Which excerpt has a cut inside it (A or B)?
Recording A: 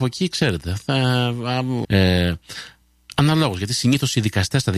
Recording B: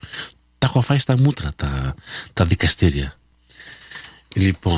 A